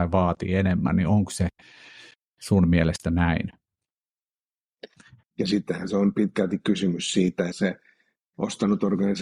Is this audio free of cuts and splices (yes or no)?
no